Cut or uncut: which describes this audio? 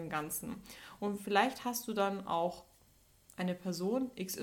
uncut